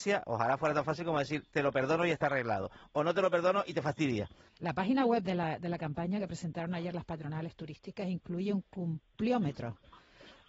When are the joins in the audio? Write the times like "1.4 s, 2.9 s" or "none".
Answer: 4.5 s